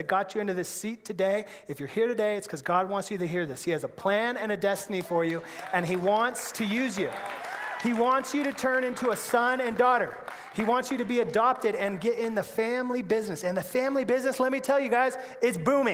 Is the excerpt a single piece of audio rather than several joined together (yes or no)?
yes